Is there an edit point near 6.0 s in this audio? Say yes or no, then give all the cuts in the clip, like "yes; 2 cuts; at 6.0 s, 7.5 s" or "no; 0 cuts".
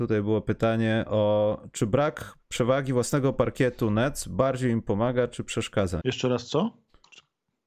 yes; 1 cut; at 6.0 s